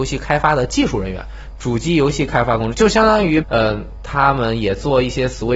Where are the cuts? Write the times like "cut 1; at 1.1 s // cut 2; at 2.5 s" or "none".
cut 1; at 1.5 s // cut 2; at 3.4 s

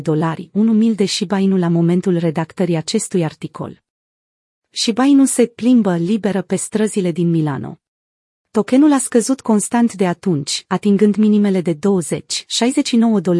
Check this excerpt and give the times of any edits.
cut 1; at 8.3 s

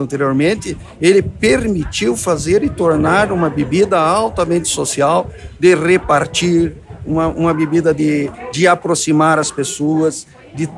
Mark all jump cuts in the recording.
none

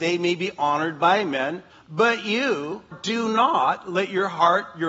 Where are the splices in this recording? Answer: cut 1; at 1.7 s // cut 2; at 2.9 s

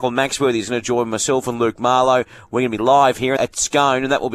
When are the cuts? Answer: cut 1; at 3.4 s

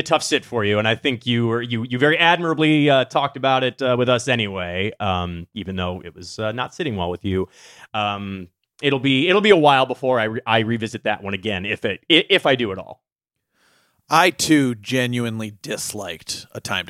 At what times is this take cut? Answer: cut 1; at 7.9 s

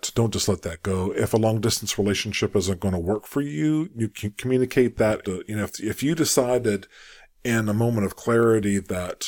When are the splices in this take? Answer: cut 1; at 5.2 s

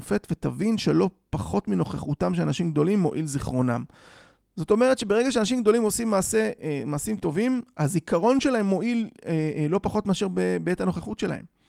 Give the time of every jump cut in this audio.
none

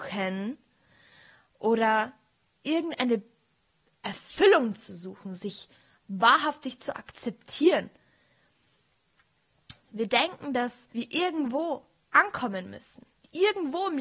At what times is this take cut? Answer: cut 1; at 9.8 s // cut 2; at 10.9 s

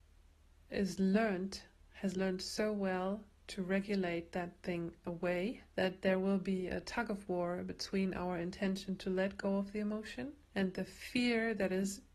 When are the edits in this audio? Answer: cut 1; at 5.7 s // cut 2; at 10.4 s

